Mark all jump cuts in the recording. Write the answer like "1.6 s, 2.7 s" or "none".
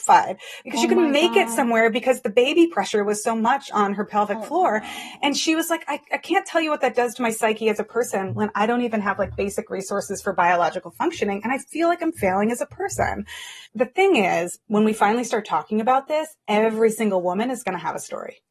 none